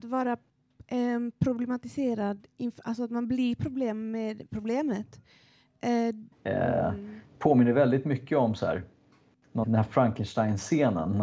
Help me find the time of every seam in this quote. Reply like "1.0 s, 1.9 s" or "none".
6.3 s, 9.6 s